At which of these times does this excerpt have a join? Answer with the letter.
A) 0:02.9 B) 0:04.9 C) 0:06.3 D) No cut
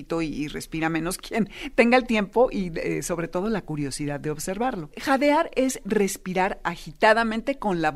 B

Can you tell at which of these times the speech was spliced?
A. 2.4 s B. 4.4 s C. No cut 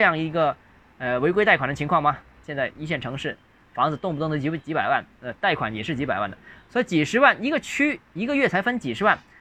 A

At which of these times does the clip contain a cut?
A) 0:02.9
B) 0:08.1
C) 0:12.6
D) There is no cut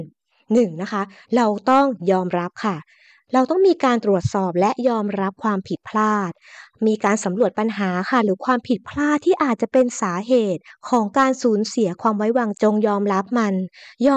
C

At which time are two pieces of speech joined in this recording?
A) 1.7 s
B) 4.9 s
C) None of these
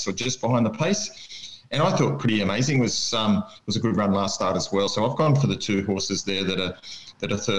B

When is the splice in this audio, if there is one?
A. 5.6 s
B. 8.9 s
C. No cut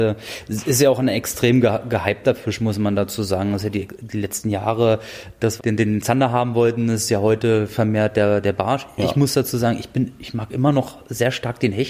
A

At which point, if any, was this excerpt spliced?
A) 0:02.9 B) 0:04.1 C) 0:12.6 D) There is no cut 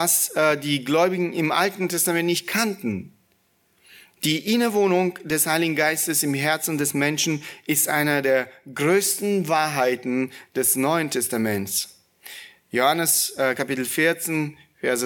D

